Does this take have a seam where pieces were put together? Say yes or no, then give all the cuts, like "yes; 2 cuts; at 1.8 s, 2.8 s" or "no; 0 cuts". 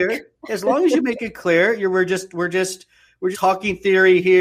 yes; 1 cut; at 3.3 s